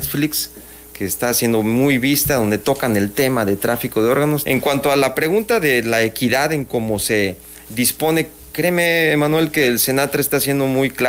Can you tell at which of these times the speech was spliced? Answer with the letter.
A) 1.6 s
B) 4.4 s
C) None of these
B